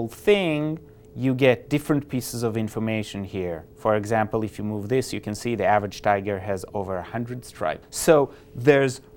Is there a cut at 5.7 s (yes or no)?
no